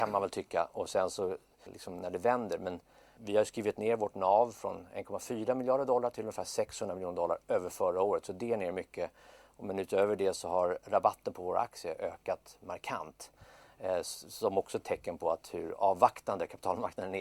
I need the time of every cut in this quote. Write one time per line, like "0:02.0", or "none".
0:01.7
0:03.2

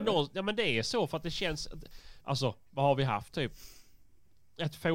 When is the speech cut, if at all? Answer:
0:02.2

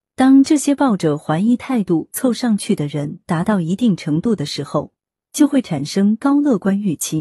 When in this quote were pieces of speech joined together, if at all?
0:05.2

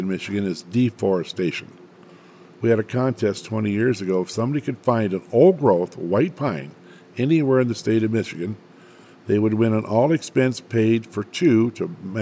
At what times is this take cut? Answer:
0:02.5

